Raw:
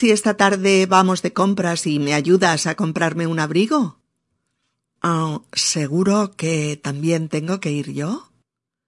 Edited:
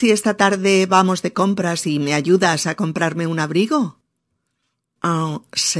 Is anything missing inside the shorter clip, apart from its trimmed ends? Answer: no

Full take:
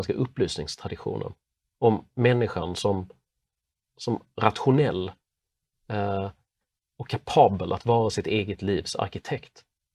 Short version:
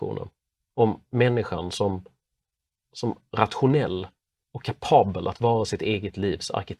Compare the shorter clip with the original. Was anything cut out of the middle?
yes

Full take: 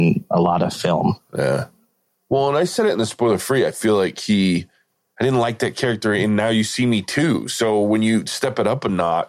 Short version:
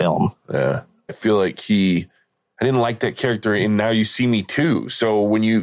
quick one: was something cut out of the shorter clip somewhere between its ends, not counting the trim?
yes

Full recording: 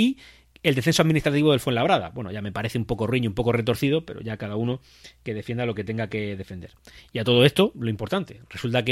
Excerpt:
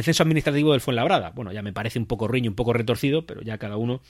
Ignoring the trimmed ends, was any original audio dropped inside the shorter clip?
no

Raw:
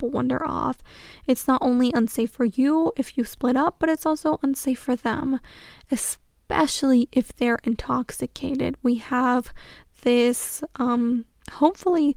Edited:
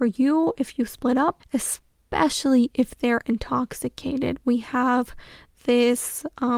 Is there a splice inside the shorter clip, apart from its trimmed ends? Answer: yes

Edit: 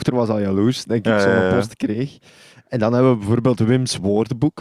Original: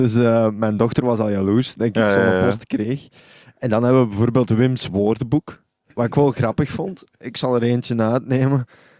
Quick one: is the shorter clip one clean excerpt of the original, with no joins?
yes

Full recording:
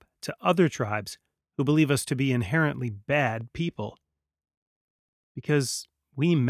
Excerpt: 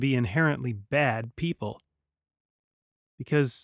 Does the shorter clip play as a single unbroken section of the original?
yes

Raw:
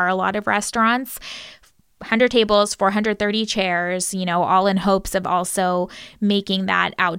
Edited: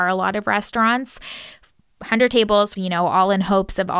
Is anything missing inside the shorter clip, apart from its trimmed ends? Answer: yes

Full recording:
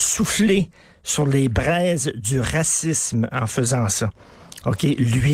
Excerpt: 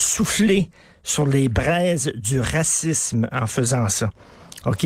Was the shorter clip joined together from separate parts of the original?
no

